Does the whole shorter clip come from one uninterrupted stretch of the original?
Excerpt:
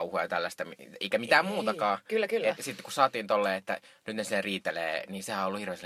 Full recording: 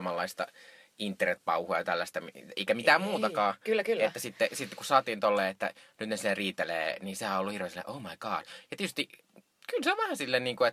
no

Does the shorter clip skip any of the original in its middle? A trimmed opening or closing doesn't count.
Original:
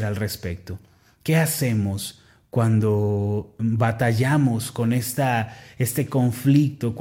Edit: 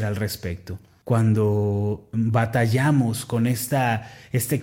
yes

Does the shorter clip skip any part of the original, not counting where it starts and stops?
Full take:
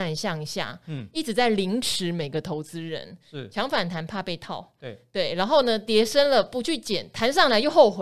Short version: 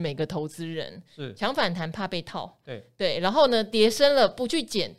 no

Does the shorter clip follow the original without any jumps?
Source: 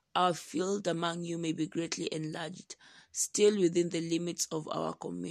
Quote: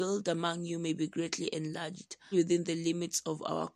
no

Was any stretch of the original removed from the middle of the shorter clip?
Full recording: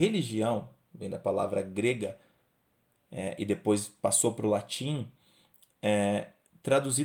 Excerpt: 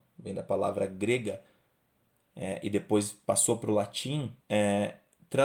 yes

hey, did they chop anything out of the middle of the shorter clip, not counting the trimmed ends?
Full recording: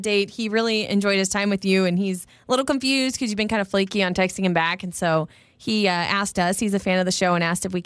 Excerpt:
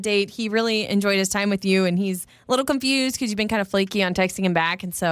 no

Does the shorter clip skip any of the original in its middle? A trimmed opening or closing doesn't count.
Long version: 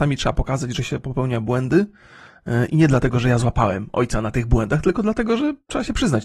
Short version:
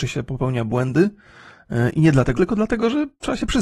yes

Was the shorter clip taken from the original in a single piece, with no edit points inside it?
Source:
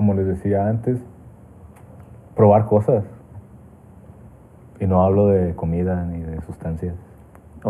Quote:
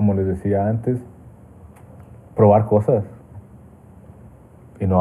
yes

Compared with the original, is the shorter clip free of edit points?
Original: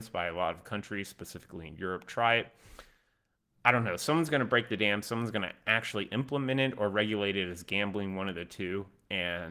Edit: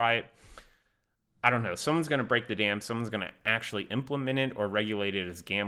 yes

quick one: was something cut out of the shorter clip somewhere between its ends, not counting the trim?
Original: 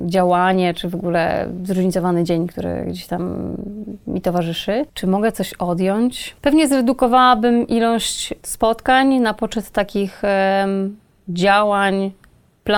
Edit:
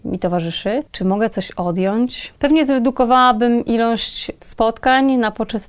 no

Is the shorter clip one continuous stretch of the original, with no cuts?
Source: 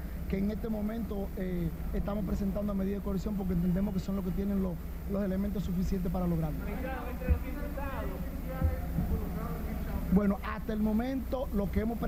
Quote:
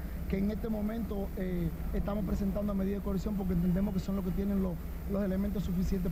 yes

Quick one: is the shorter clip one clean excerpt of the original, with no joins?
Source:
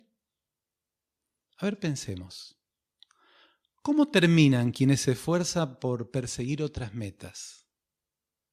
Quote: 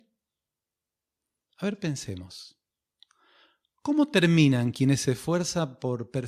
yes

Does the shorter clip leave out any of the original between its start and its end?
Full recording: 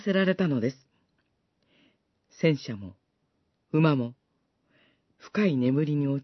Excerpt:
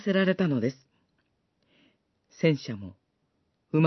no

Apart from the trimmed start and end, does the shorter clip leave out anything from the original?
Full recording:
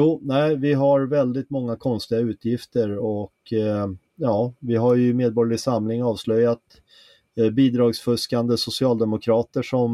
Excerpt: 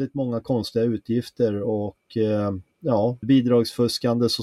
yes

